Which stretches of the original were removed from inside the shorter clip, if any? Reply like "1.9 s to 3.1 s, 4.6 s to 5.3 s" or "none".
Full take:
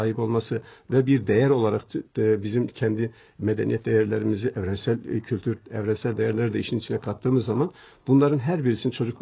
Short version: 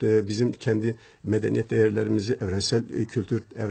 none